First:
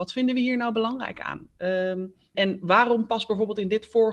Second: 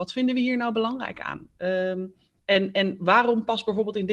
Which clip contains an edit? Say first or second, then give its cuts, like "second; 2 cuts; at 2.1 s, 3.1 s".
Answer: first; 1 cut; at 2.3 s